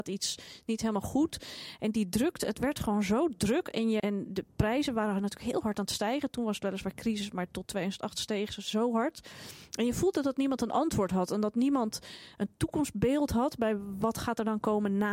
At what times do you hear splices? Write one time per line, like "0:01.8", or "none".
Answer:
0:04.0

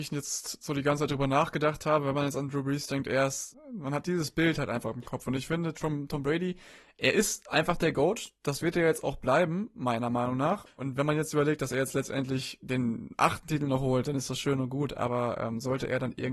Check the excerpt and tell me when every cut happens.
0:10.7

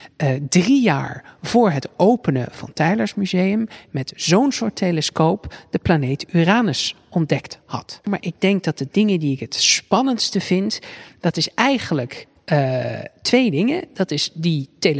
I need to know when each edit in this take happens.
0:08.0

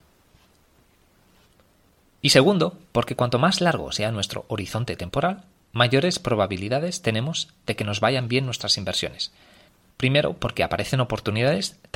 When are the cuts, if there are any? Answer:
0:09.9

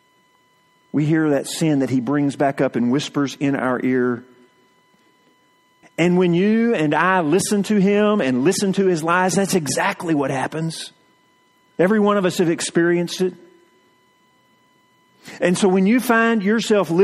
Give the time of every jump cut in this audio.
0:05.8

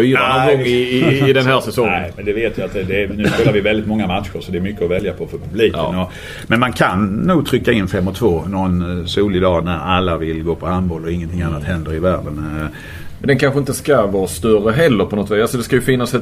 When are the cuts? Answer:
0:09.6
0:13.2

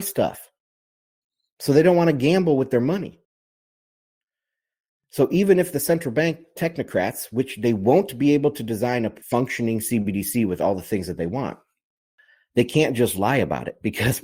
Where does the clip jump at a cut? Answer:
0:09.2

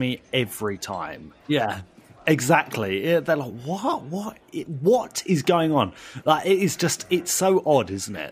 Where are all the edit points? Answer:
0:01.4

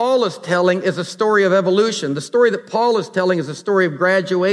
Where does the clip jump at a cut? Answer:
none

